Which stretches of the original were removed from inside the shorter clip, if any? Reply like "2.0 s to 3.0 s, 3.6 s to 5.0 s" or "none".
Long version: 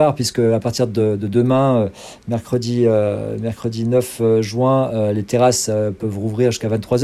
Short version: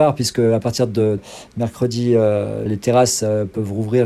1.2 s to 1.9 s, 3.4 s to 5.1 s